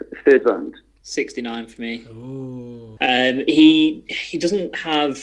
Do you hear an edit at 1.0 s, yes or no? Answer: yes